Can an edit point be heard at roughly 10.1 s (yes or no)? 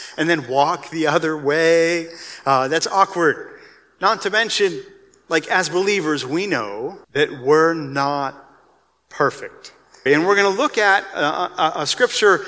yes